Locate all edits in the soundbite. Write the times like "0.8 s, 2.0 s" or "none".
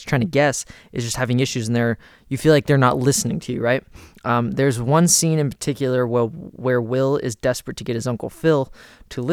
4.1 s